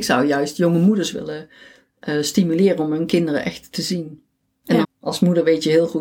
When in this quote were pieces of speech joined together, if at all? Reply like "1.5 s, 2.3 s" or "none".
4.8 s